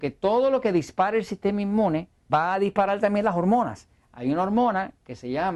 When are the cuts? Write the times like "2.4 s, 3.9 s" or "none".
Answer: 2.3 s